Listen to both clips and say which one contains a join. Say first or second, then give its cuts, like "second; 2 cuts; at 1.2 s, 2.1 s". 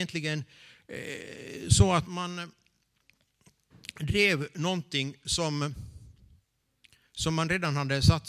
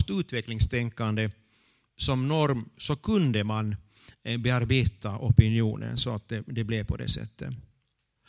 first; 1 cut; at 2.1 s